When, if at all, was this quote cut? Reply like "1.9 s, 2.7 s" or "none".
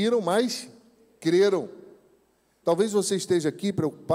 2.6 s